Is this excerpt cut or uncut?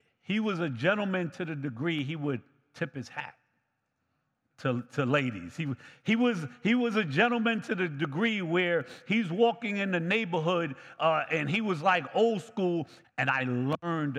cut